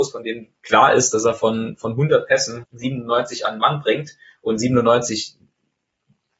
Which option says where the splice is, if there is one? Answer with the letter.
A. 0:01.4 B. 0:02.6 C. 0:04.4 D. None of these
B